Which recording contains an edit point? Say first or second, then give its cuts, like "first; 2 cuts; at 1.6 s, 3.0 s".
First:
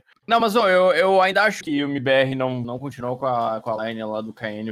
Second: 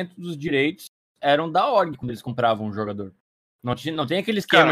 first; 2 cuts; at 1.6 s, 2.6 s